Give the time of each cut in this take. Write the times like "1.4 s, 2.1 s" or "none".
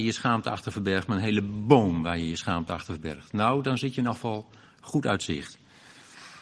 none